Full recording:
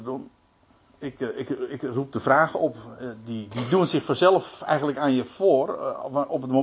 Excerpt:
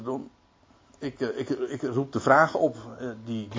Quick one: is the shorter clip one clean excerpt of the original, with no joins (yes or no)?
yes